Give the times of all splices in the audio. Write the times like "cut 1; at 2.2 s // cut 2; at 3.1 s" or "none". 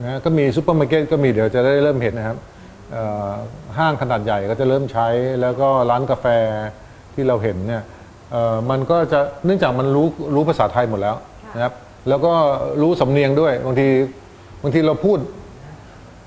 cut 1; at 2.1 s

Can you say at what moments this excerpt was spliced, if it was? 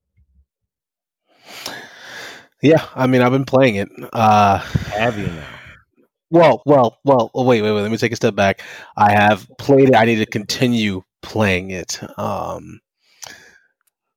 cut 1; at 6.6 s

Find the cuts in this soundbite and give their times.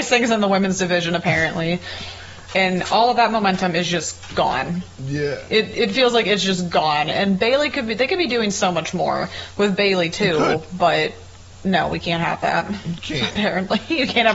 cut 1; at 2.5 s

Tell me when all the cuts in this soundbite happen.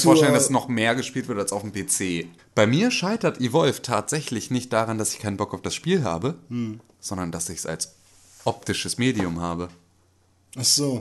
cut 1; at 2.4 s

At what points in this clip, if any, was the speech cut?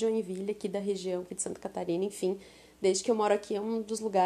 none

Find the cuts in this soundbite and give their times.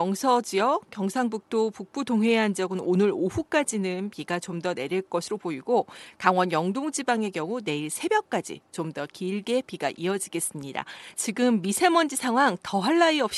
cut 1; at 11.1 s

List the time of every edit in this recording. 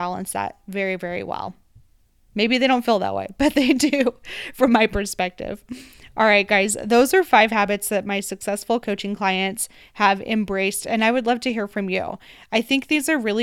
none

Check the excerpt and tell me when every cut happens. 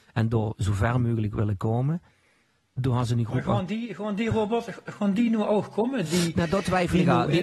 none

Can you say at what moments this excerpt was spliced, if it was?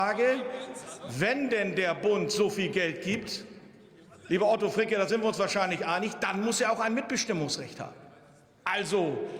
none

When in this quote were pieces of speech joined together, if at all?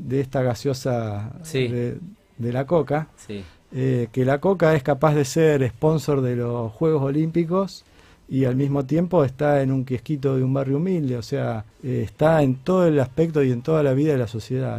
cut 1; at 11.7 s

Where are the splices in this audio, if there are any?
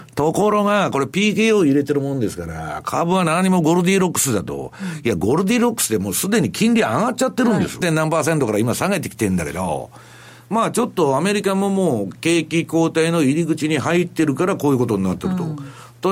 cut 1; at 7.8 s

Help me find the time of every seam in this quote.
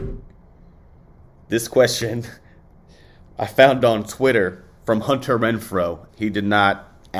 cut 1; at 6.1 s

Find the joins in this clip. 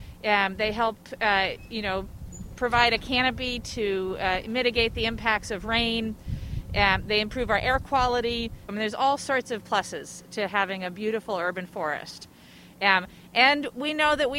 cut 1; at 8.7 s

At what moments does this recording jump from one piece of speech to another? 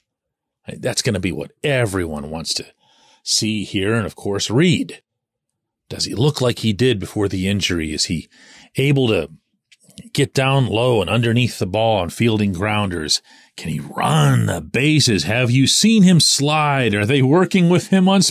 none

